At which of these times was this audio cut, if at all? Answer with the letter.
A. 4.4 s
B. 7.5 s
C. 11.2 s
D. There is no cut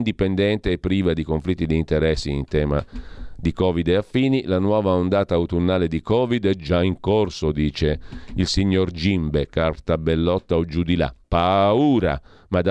C